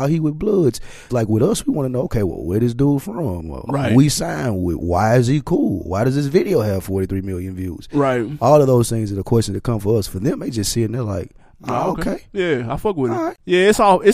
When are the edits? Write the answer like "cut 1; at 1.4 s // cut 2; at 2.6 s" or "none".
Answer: cut 1; at 1.1 s